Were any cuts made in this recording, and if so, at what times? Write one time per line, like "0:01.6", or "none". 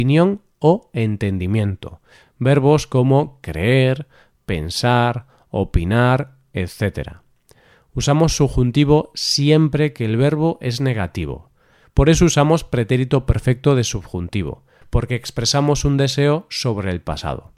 0:11.8